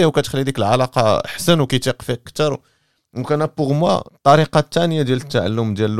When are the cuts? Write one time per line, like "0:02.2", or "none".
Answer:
0:04.1